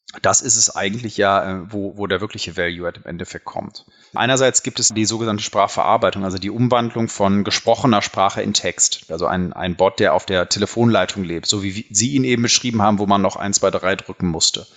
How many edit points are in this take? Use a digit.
1